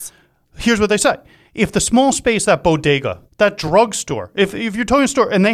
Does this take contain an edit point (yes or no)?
yes